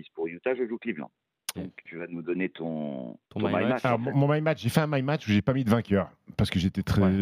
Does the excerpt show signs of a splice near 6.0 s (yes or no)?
no